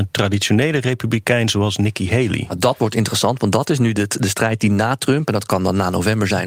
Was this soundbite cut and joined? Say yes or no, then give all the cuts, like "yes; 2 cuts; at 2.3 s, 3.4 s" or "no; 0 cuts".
no; 0 cuts